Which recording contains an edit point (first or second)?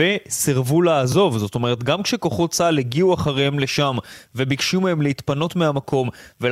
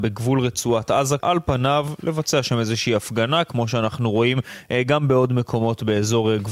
second